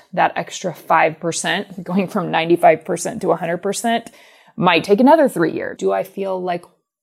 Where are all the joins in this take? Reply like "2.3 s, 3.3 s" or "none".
5.8 s

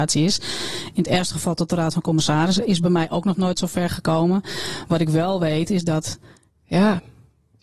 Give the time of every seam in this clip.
6.5 s

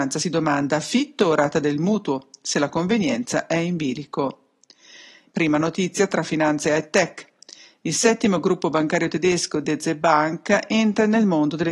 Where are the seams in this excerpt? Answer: 5.3 s

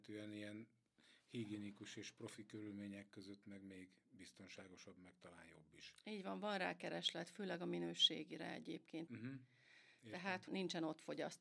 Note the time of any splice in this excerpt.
9.1 s, 10.5 s

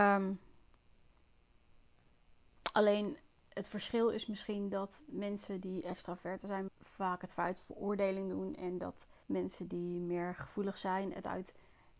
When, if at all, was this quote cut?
6.7 s, 9.2 s

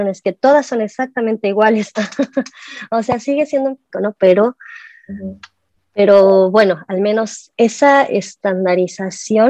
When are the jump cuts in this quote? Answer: 3.9 s, 7.5 s

